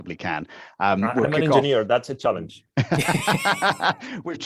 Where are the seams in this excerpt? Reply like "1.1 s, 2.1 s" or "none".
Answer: none